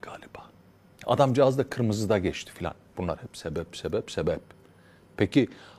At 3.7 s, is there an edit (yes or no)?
yes